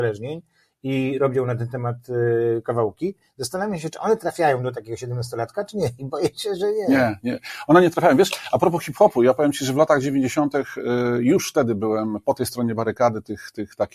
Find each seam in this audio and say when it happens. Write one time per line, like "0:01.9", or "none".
none